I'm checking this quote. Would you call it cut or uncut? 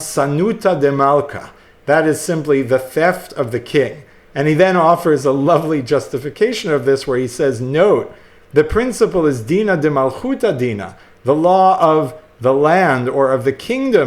uncut